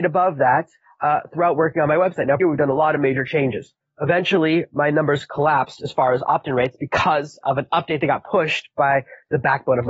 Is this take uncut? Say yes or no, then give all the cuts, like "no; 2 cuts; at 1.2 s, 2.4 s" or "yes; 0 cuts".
no; 1 cut; at 2.4 s